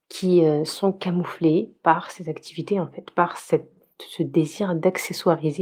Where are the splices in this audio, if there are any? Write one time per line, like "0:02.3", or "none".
none